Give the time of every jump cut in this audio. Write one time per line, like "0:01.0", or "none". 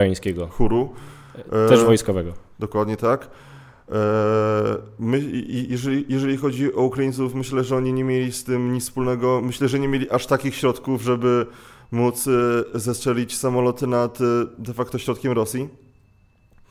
none